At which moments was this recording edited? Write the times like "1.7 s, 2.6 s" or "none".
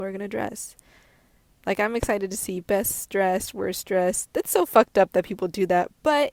1.6 s